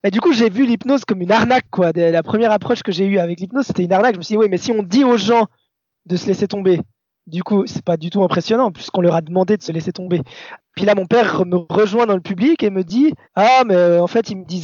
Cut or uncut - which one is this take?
cut